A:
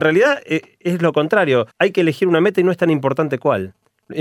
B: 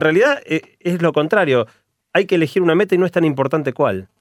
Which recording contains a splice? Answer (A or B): A